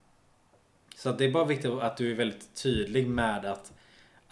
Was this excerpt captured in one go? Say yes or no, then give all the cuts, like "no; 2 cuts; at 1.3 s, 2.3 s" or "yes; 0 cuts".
yes; 0 cuts